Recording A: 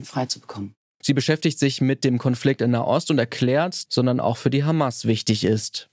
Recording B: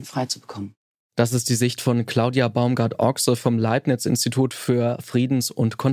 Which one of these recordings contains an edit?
A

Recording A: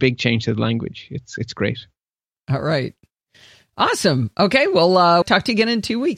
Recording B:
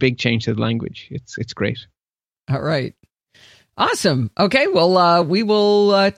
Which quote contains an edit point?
A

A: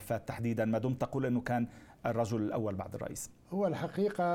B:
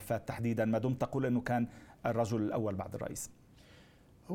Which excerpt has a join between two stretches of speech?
A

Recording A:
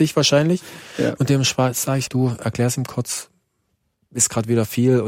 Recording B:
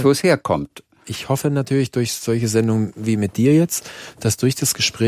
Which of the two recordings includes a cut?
A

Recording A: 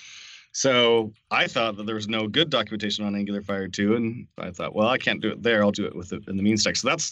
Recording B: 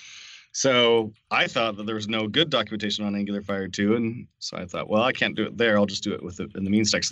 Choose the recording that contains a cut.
A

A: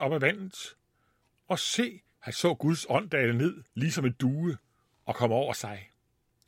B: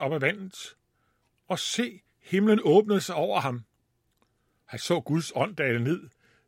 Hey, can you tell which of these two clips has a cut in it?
A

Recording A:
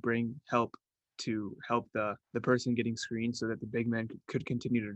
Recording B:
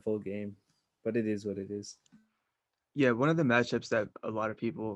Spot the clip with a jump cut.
A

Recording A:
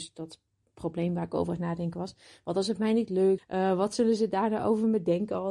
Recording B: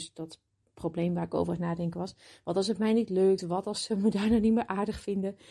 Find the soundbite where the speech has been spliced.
A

